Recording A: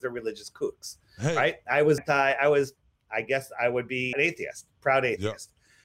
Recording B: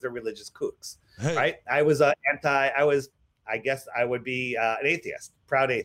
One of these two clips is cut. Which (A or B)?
A